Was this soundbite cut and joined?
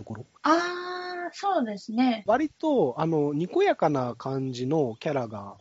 yes; 1 cut; at 2.3 s

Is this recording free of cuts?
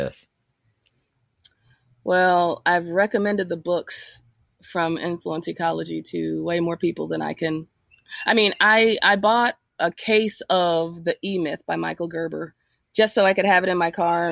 yes; 0 cuts

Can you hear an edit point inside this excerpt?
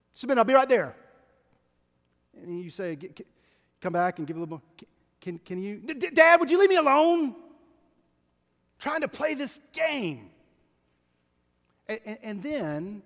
no; 0 cuts

